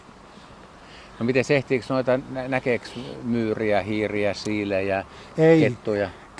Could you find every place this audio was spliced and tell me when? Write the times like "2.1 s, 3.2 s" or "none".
none